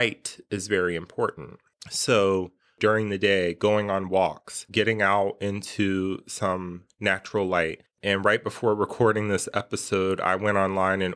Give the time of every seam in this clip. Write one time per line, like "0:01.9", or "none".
0:04.7
0:07.9